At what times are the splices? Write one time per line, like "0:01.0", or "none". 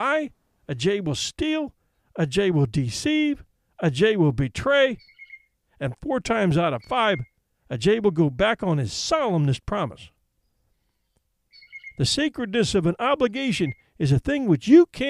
none